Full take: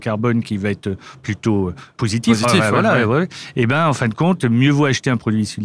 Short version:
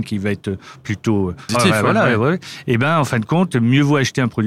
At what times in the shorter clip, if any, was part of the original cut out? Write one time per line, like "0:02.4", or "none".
0:01.5